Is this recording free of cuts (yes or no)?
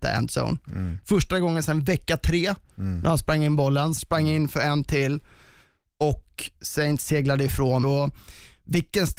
no